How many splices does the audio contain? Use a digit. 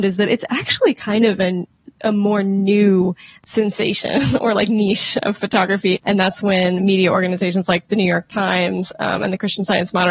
1